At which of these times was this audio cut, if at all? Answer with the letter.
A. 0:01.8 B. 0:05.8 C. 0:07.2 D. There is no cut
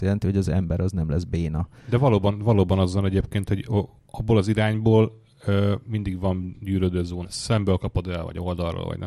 C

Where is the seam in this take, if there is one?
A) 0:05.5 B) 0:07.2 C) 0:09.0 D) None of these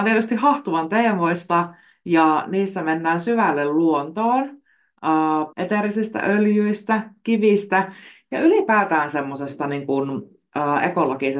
A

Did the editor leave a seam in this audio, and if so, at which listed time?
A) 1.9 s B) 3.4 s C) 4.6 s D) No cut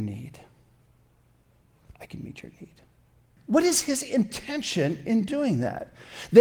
B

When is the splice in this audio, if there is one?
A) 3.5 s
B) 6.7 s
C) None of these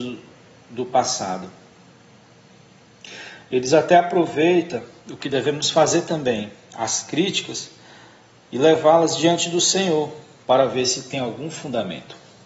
C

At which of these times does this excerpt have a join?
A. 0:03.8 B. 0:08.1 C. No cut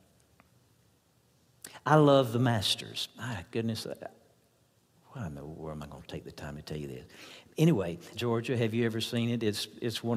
B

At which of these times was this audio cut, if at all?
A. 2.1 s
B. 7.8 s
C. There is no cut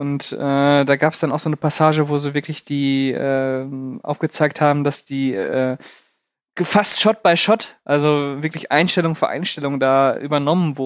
C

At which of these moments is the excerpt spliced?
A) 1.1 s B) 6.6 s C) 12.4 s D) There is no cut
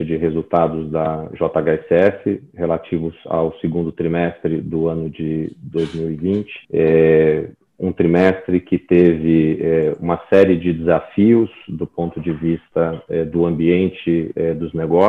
B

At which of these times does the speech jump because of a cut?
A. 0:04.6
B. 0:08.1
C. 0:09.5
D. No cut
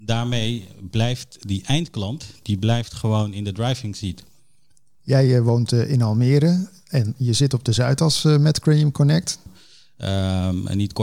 C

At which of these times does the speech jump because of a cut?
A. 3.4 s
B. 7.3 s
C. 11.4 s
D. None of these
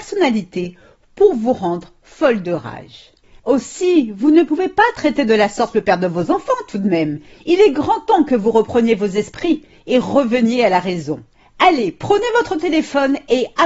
A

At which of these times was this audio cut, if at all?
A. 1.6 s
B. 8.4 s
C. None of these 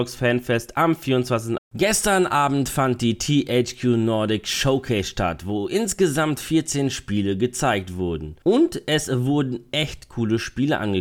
A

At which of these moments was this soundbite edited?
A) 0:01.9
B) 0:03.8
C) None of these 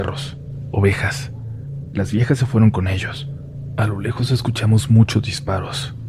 A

